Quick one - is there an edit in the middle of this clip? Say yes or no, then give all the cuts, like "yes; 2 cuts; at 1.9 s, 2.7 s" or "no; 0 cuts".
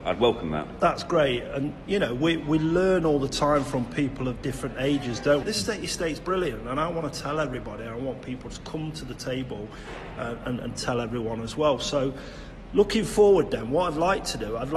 yes; 1 cut; at 5.4 s